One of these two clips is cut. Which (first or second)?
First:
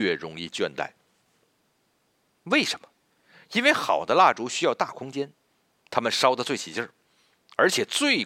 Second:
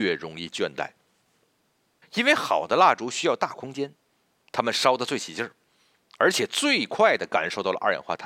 second